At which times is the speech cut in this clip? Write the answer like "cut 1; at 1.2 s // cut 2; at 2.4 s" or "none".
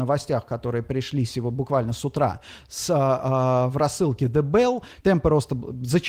cut 1; at 5.0 s